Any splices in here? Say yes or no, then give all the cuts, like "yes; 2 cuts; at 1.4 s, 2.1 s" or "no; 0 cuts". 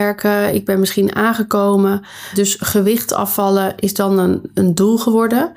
no; 0 cuts